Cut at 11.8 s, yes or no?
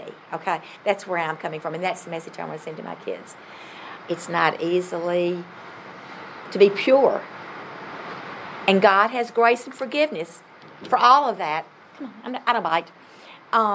no